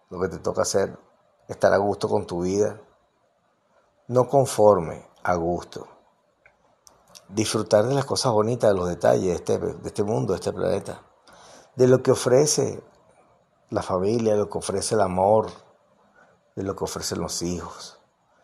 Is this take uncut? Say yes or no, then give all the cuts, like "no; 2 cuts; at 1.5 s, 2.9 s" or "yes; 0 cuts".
yes; 0 cuts